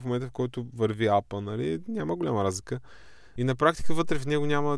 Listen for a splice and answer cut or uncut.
cut